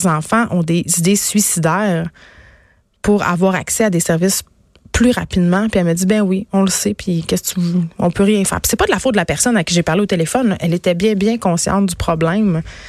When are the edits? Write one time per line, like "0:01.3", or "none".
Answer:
none